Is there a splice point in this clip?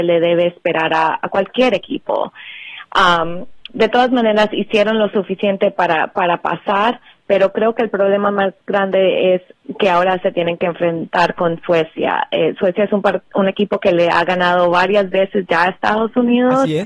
yes; 1 cut; at 3.7 s

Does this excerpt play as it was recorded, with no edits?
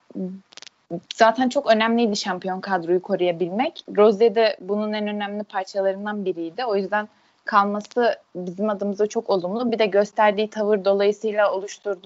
yes; 0 cuts

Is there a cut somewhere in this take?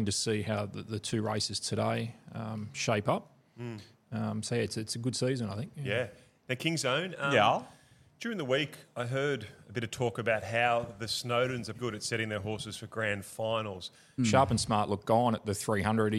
yes; 2 cuts; at 11.7 s, 14.2 s

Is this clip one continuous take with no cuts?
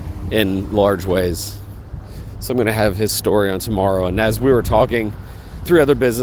yes; 0 cuts

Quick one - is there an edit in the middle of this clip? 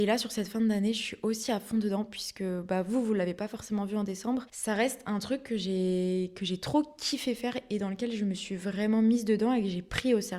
yes; 1 cut; at 4.5 s

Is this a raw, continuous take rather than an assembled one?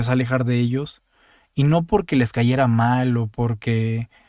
yes; 0 cuts

